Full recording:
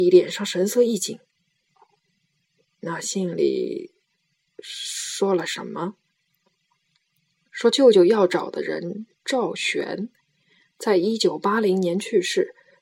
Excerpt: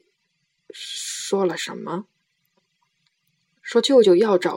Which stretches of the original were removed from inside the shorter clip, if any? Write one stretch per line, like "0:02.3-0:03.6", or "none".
none